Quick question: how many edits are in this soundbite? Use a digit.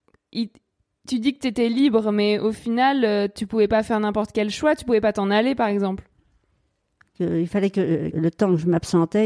2